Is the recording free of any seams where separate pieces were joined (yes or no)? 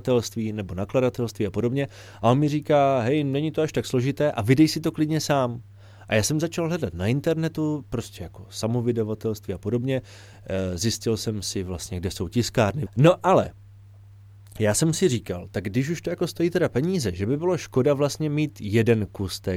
no